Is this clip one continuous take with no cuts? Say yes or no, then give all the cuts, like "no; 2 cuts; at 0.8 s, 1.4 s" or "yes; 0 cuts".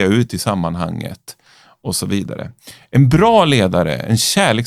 yes; 0 cuts